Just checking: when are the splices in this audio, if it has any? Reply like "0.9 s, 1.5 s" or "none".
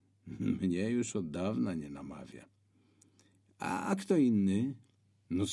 3.5 s